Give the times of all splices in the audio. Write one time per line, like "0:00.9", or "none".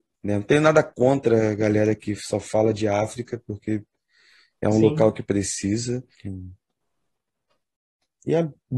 0:06.2